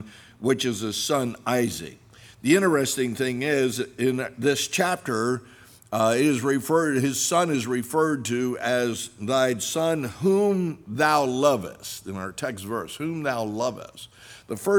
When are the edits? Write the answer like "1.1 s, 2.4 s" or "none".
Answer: none